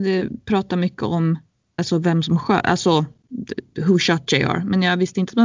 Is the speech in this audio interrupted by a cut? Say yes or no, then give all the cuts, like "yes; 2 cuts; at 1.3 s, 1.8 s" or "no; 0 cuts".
yes; 1 cut; at 1.8 s